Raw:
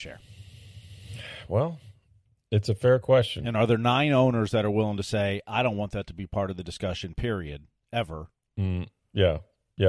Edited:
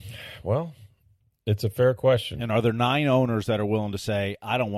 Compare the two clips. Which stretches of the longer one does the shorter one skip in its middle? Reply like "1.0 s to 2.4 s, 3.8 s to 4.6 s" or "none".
none